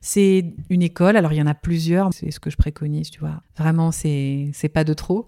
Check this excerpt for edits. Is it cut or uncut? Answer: cut